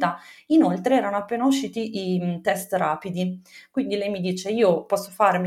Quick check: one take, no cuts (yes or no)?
yes